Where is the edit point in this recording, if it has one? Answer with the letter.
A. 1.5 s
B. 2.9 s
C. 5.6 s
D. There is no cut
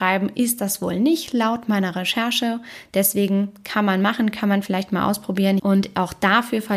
C